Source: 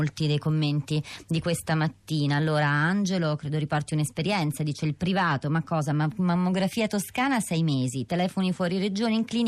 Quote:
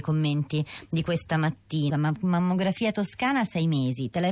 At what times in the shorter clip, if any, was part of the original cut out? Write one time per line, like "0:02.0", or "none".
0:01.9